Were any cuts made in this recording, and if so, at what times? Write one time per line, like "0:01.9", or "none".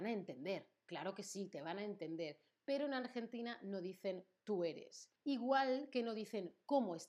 0:05.2